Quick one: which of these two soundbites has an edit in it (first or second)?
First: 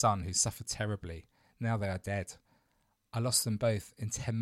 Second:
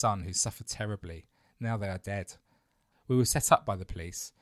second